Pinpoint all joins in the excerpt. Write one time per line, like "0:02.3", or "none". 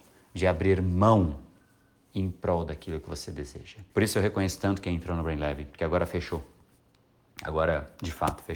0:03.9